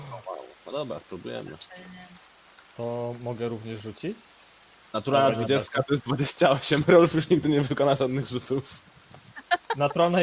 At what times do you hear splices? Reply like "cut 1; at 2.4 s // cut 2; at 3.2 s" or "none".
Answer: none